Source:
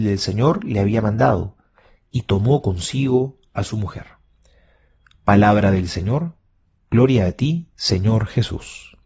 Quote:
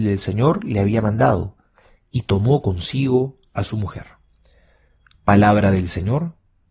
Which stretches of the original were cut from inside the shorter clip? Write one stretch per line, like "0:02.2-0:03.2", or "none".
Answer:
none